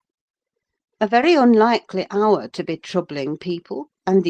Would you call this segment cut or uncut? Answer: cut